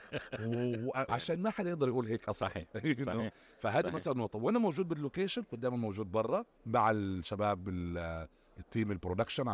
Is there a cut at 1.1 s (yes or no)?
yes